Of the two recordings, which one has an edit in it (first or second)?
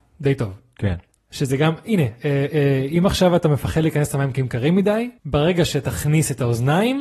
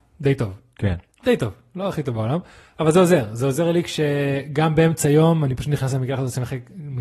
first